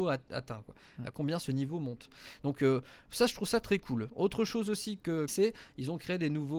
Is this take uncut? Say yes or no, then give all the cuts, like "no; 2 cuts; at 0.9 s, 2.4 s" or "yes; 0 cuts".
no; 1 cut; at 5.3 s